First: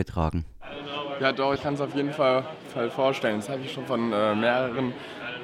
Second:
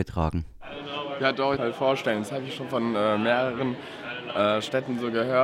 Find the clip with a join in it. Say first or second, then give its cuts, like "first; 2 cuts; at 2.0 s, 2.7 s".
second; 1 cut; at 1.6 s